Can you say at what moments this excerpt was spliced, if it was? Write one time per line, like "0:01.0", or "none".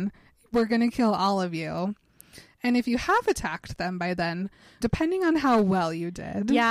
0:04.8